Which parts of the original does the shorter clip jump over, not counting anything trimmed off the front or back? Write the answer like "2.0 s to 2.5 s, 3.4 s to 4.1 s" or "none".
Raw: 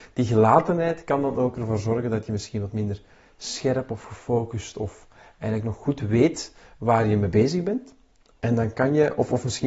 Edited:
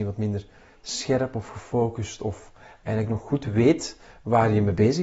none